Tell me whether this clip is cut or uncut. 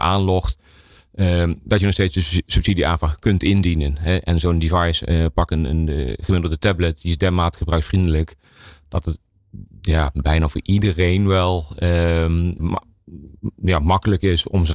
cut